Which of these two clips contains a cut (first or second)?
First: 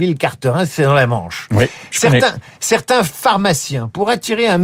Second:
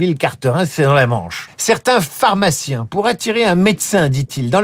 second